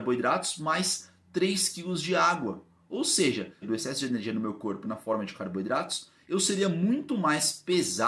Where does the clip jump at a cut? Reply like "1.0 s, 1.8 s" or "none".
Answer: 3.6 s